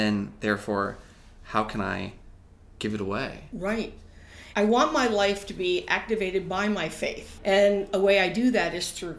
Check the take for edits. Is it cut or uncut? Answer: cut